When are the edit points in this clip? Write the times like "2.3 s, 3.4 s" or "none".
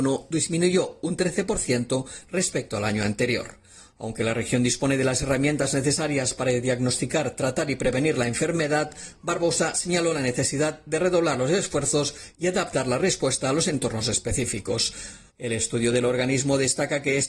15.3 s